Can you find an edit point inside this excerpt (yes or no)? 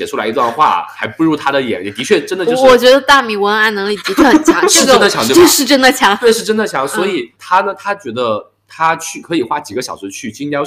no